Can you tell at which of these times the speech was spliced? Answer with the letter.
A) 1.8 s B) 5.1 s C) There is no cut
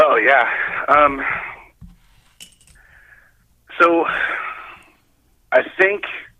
C